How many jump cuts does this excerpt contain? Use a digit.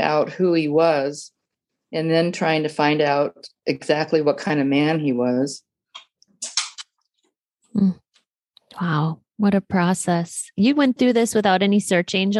0